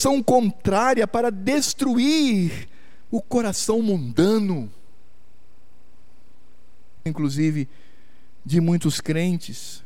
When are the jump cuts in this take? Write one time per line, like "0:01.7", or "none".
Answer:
0:07.1